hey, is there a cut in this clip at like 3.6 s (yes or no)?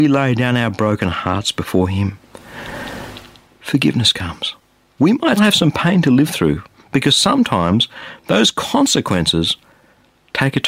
no